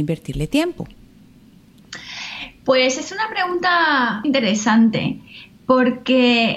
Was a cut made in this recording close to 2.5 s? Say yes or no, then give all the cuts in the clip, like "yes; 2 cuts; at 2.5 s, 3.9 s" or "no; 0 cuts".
no; 1 cut; at 4.2 s